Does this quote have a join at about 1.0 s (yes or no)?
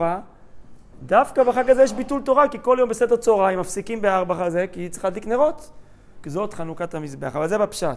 no